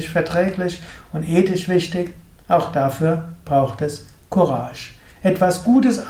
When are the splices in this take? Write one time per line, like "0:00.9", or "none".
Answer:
0:05.1